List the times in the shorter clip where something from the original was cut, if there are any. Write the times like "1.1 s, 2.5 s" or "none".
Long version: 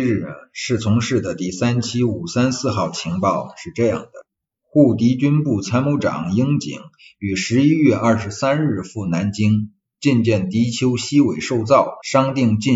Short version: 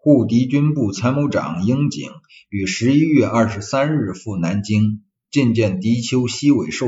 none